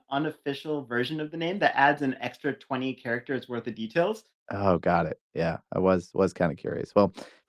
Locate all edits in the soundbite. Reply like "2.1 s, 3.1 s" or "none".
4.3 s